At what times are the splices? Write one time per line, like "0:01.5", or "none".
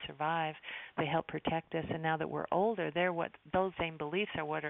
0:03.7